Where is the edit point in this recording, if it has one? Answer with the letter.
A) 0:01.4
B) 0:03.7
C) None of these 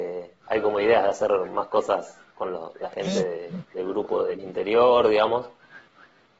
C